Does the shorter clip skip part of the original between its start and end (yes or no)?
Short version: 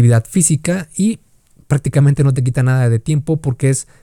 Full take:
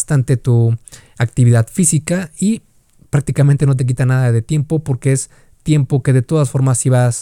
no